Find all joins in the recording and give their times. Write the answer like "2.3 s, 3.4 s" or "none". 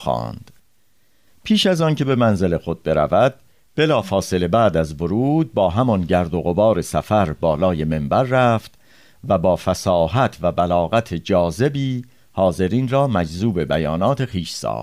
none